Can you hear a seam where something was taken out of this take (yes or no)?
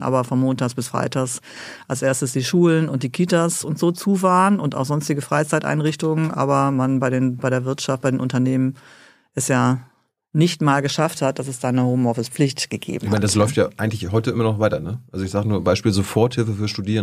no